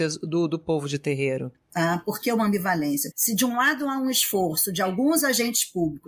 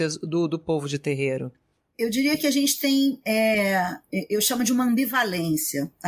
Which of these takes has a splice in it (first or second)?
first